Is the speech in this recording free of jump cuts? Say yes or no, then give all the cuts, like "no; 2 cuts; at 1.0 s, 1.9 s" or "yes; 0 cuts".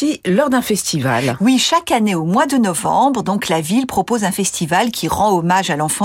yes; 0 cuts